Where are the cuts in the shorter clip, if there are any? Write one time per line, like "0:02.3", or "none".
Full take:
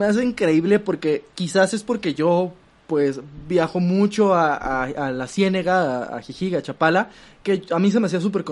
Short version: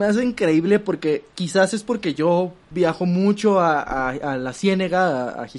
0:02.7

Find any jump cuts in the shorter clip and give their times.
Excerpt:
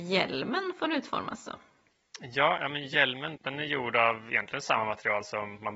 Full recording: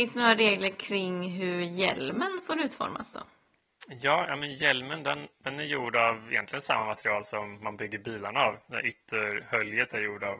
0:03.4

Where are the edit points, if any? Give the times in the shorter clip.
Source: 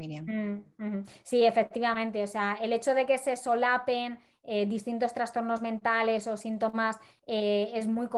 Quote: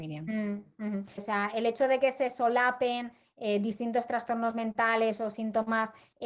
0:01.2

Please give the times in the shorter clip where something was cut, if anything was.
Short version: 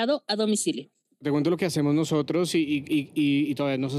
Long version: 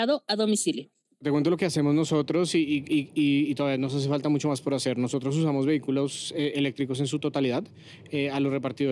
none

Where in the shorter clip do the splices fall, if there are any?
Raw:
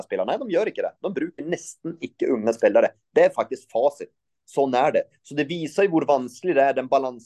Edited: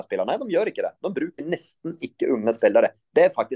none

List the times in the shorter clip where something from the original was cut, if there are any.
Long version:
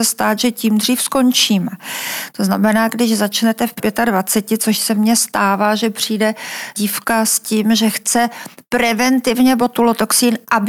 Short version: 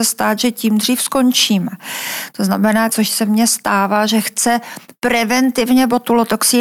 0:02.9
0:04.1

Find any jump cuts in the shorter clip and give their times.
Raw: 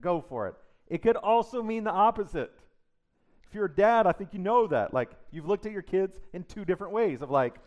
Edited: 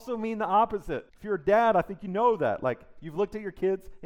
0:01.1

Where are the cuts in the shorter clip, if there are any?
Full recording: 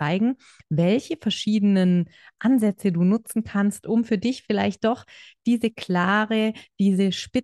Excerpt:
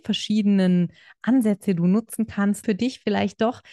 0:02.6

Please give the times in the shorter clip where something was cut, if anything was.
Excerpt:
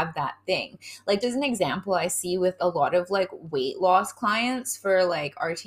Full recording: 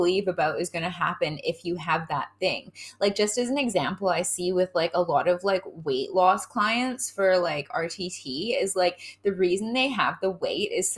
0:01.2
0:02.6

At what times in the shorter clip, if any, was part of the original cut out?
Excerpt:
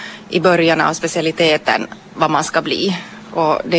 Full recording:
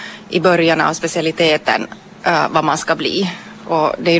0:02.1

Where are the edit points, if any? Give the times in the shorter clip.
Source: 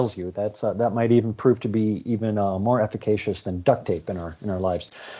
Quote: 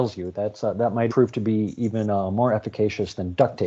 0:01.1

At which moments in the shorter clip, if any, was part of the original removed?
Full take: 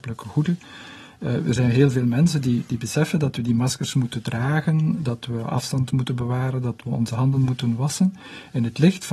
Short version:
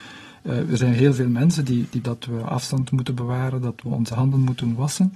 0:02.0

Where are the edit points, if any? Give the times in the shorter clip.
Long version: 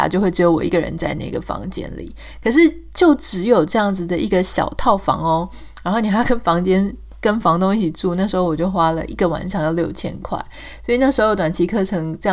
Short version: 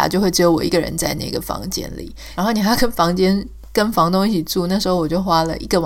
0:02.4

